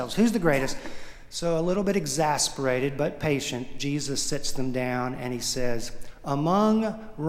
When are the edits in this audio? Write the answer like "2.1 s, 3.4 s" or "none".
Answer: none